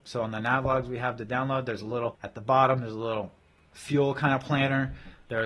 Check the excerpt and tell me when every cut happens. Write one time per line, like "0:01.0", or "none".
none